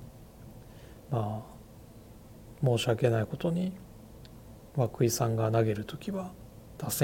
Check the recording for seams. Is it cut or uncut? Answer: cut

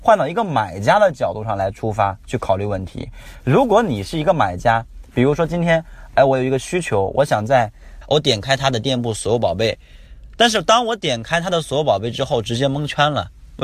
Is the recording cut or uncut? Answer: cut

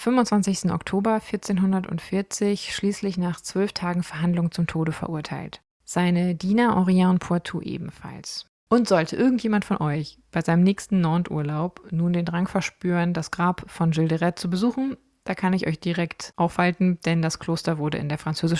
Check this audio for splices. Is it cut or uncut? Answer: cut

